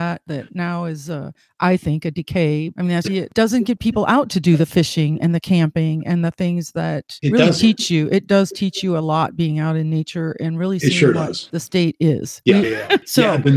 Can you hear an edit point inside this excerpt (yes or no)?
yes